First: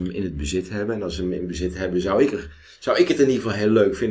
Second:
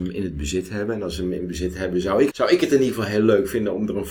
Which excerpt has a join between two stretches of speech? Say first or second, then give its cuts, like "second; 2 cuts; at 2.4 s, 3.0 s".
second; 1 cut; at 2.3 s